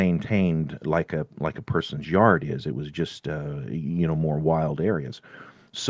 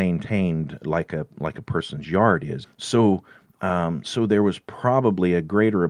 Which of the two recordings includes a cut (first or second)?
second